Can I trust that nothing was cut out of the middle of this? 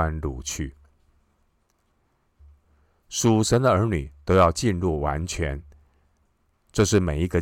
no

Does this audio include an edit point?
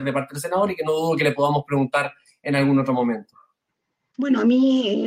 yes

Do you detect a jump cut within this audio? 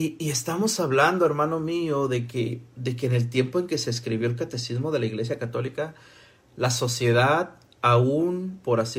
no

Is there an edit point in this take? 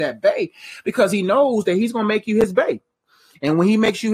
no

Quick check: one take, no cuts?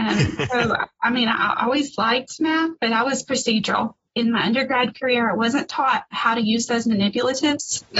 no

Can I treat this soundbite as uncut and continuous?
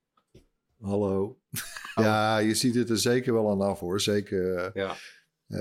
no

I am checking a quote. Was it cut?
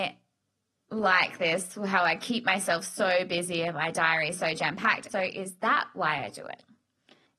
yes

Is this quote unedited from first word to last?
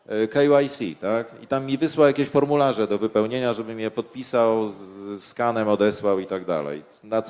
yes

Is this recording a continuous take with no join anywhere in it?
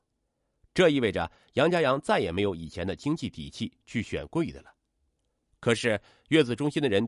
no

